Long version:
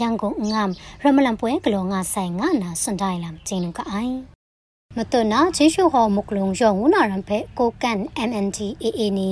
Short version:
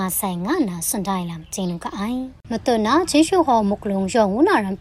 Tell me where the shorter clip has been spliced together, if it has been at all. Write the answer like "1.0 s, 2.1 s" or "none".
2.4 s

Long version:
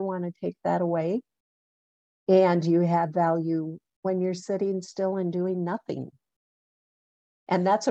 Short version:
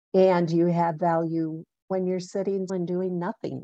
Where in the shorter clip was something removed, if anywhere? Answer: 2.7 s

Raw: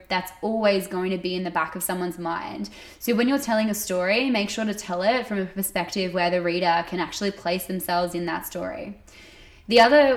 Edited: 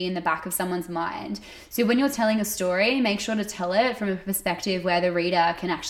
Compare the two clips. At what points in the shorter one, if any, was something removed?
none

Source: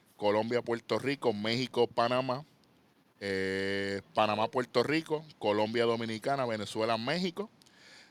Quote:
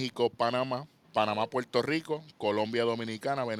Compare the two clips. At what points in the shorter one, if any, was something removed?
1.0 s

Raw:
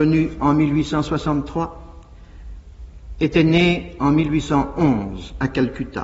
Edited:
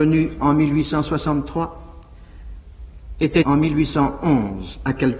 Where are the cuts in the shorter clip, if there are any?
3.4 s

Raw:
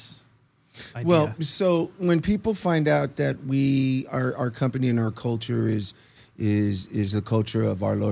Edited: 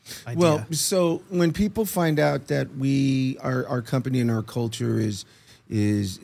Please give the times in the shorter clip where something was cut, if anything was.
none

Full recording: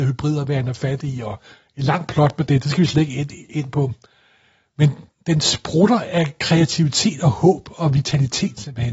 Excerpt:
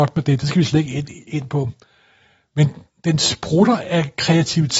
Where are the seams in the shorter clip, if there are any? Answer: none

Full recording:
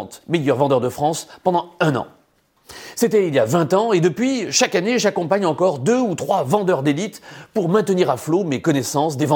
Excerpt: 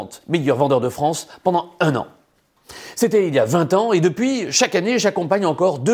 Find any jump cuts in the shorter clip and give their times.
none

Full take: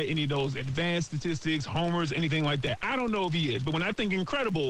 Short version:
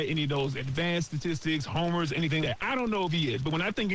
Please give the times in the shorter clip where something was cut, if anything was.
2.4 s

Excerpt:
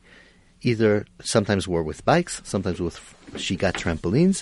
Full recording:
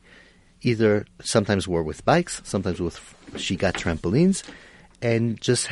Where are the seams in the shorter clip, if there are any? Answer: none

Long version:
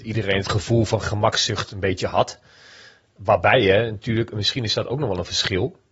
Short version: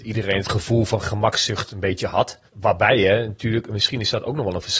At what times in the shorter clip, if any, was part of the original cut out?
2.5 s

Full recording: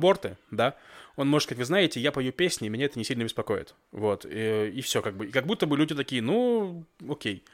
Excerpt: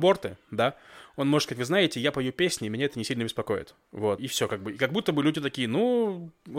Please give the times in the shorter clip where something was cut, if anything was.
4.2 s

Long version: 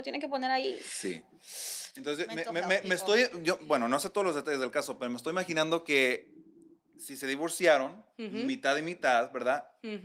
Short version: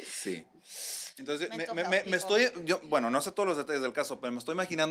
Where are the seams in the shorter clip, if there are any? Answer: none

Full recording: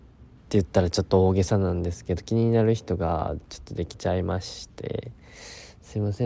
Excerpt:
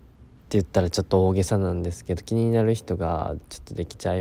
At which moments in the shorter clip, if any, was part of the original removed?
none

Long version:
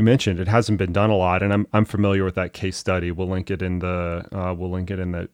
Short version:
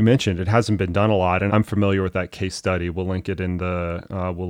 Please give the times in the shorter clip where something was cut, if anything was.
1.5 s

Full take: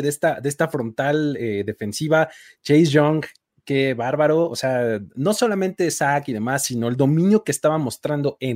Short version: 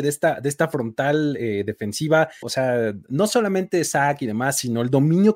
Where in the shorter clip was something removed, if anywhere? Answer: 2.4 s

